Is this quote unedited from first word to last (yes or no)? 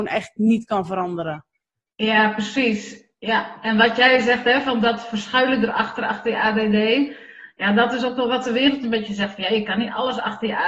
yes